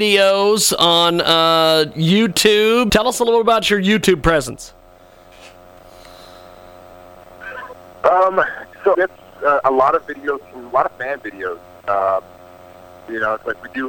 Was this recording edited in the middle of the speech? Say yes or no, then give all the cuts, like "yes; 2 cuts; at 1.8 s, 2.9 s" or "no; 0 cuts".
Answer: yes; 2 cuts; at 2.9 s, 8.9 s